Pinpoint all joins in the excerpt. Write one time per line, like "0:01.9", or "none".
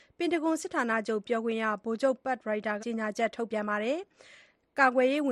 0:02.8